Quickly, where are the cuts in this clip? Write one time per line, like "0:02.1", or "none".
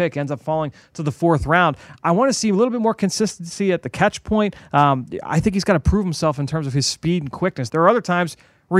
0:01.9
0:07.7